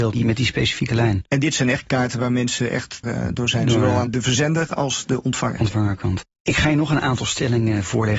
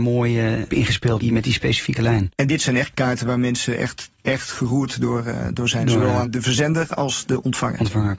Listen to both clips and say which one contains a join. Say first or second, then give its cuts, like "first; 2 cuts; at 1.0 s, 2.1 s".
first; 1 cut; at 3.0 s